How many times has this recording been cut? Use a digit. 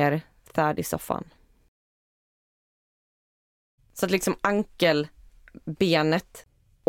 1